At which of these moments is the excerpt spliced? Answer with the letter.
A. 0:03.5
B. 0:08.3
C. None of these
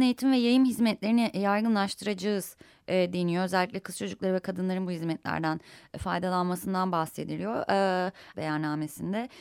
B